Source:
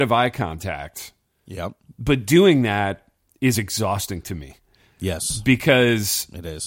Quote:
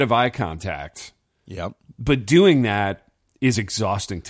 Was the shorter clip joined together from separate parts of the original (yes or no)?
no